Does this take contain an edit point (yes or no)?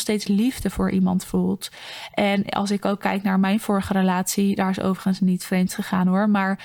no